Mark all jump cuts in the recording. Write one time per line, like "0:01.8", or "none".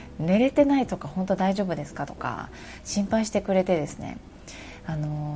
0:02.0